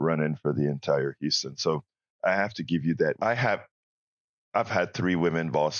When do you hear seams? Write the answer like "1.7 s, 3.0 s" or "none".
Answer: 3.2 s